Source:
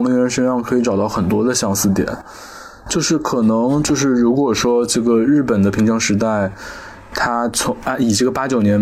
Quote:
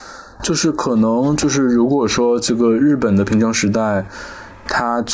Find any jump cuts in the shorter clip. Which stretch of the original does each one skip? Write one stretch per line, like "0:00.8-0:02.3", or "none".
none